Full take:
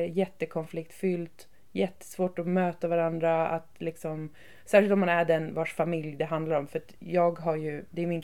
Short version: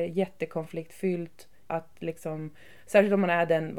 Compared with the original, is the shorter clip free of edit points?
no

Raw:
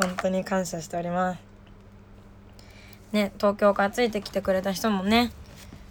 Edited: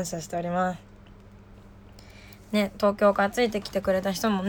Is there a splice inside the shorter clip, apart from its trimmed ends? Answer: no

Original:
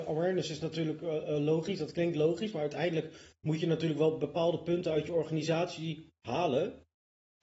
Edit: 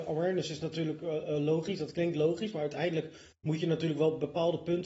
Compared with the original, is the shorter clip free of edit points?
yes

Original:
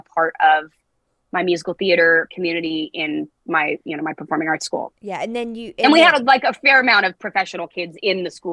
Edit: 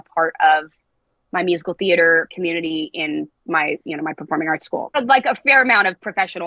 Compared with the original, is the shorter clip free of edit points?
no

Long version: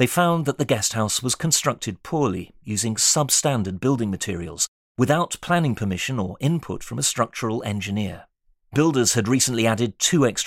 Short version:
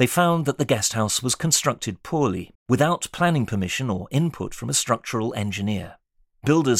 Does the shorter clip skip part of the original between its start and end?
yes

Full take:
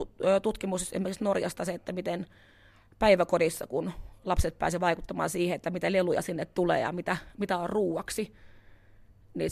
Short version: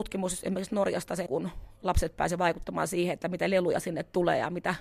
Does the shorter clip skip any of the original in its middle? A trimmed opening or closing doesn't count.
yes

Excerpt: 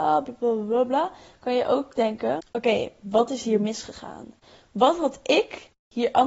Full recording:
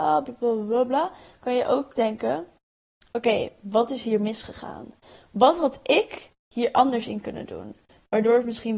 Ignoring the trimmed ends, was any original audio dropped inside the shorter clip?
yes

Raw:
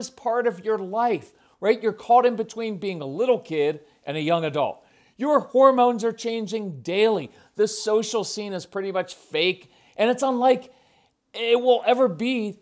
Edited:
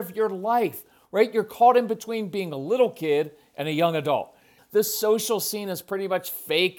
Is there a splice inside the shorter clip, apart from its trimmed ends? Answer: yes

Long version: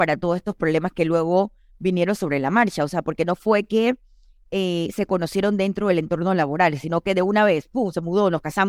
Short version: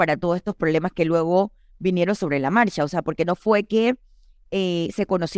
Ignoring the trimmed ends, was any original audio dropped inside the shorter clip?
no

